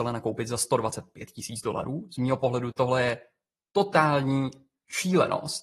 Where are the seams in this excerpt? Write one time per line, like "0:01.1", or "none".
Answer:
0:02.7